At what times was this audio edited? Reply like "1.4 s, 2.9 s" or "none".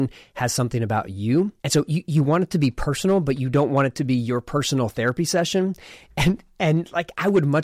1.6 s